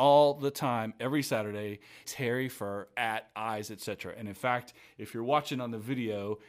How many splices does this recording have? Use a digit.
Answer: 1